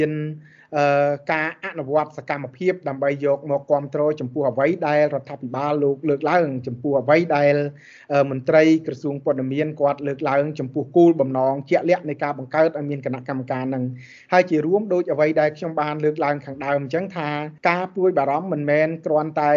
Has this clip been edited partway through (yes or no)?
yes